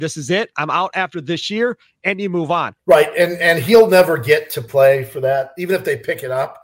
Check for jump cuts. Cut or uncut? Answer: cut